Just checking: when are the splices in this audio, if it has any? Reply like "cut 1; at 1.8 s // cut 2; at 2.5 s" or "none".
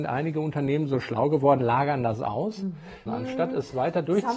cut 1; at 3.1 s

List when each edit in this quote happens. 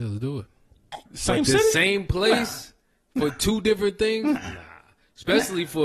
cut 1; at 1.1 s

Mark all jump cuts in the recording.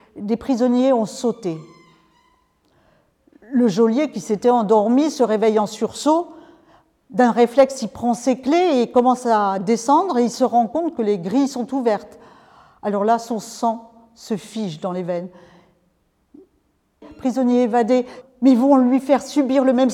cut 1; at 17.0 s // cut 2; at 18.2 s

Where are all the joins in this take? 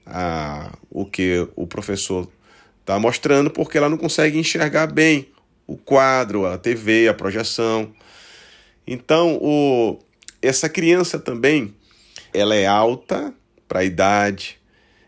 cut 1; at 12.3 s

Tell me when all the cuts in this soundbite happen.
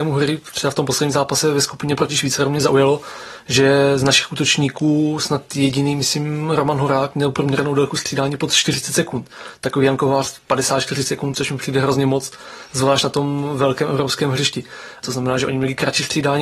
cut 1; at 11.3 s // cut 2; at 15.0 s

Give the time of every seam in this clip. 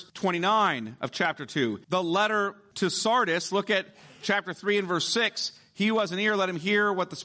cut 1; at 1.8 s

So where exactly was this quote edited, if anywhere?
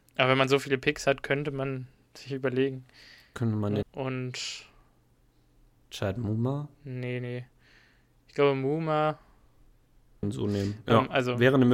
cut 1; at 3.8 s // cut 2; at 10.2 s

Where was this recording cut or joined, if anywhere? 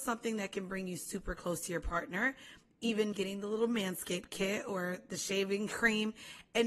cut 1; at 3.1 s

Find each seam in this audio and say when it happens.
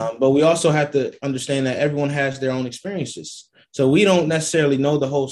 none

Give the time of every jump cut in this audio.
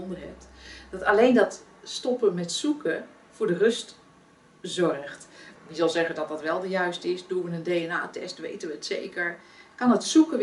cut 1; at 5.5 s

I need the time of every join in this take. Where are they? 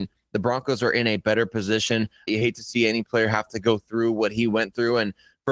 cut 1; at 2.3 s

